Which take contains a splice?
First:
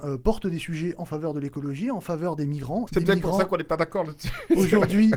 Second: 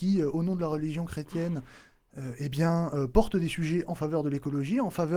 first; 1 cut; at 2.9 s

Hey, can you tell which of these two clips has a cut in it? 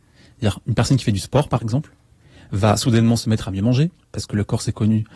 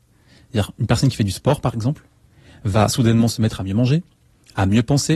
first; 1 cut; at 4.0 s

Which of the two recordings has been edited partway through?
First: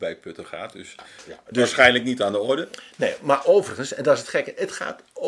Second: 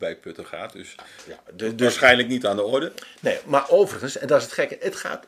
first; 1 cut; at 1.5 s

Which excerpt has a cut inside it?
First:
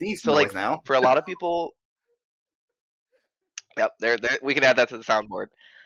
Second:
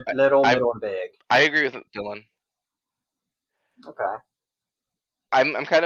second; 1 cut; at 1.9 s

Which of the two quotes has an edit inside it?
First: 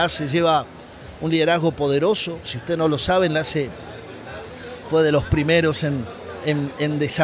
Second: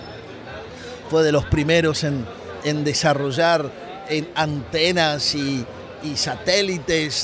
second; 1 cut; at 2.6 s

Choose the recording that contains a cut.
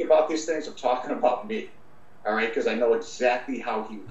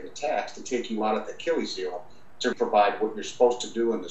second; 1 cut; at 2.5 s

